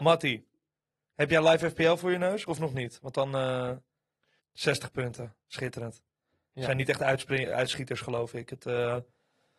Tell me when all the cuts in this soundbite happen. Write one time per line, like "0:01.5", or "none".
0:04.4